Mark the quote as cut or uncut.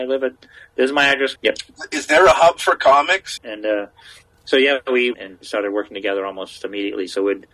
cut